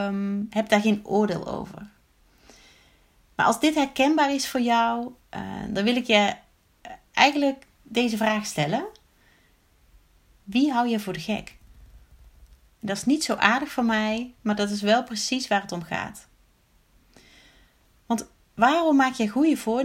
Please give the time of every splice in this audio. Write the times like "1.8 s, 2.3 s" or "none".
none